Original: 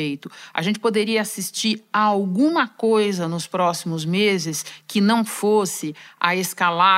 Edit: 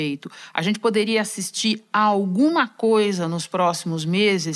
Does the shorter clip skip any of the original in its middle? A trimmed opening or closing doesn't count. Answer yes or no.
no